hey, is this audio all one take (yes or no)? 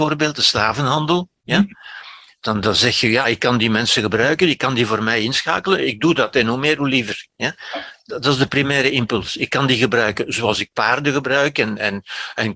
yes